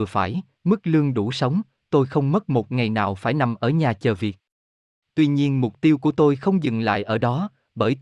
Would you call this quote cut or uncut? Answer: uncut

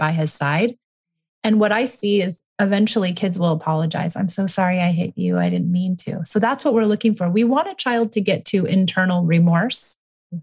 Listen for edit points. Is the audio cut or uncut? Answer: uncut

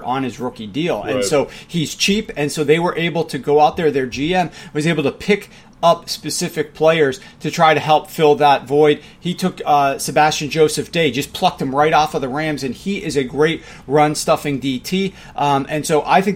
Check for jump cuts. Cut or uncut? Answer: uncut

